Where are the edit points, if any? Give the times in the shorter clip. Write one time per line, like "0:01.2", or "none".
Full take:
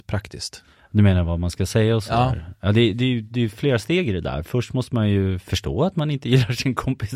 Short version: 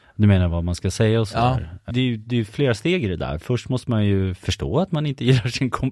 0:01.9